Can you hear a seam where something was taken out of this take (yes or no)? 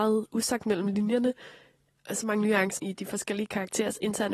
yes